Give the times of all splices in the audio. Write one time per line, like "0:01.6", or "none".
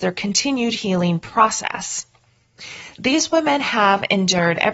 0:02.9